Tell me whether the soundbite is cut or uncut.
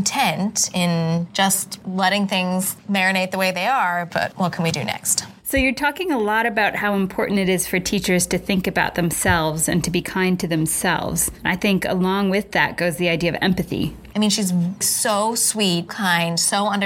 cut